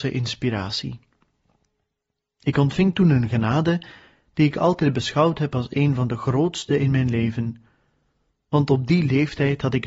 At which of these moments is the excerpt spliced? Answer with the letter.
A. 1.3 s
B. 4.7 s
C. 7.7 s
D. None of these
D